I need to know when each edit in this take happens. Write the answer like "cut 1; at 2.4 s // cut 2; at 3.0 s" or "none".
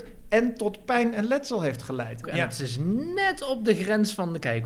cut 1; at 2.2 s

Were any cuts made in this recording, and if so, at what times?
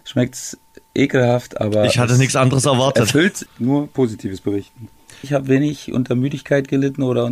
cut 1; at 3.5 s // cut 2; at 5.2 s

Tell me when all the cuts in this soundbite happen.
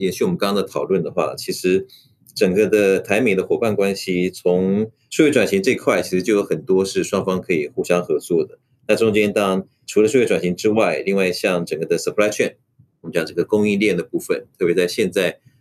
none

